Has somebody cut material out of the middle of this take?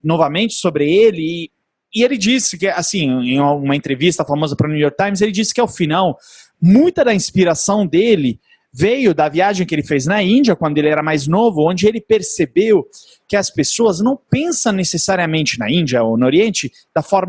no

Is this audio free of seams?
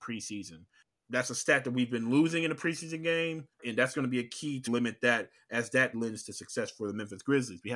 no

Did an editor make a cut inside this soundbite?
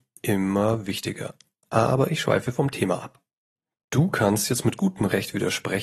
no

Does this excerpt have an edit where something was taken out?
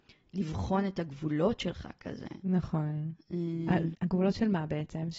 yes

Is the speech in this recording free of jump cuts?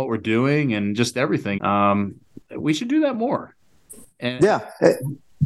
no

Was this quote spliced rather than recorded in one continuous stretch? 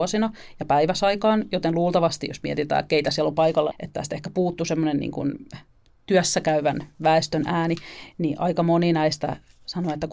yes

